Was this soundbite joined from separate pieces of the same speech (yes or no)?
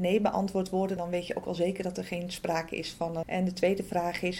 yes